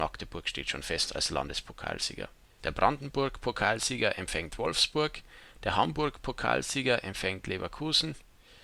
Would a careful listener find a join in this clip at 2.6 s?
yes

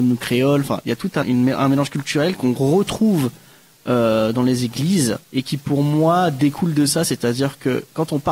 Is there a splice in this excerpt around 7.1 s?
no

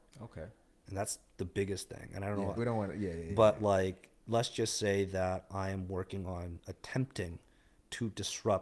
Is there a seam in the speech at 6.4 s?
no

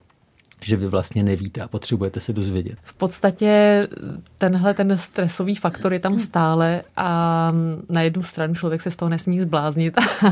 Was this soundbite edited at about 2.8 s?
yes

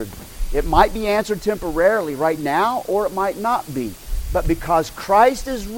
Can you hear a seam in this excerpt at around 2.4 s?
no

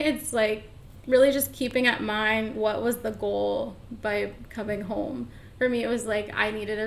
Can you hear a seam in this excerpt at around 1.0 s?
no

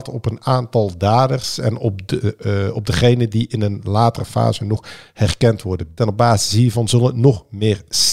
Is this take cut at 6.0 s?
yes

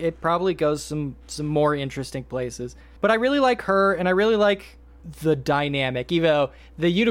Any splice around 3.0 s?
yes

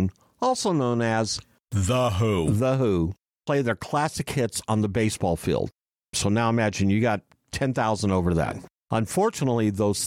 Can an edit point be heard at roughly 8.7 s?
no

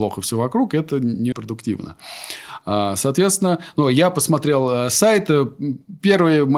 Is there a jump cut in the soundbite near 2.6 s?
no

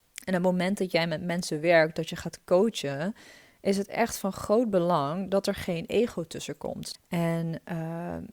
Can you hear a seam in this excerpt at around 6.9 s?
yes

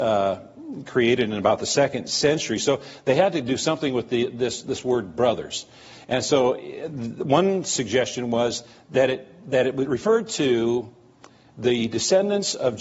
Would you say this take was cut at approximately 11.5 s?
no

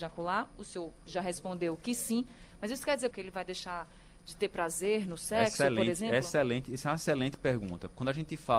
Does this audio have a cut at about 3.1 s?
yes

